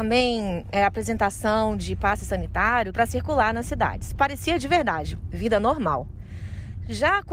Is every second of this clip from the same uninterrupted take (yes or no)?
no